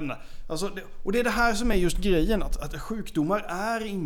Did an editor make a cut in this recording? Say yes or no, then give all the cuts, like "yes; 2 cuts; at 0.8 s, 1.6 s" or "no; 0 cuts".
no; 0 cuts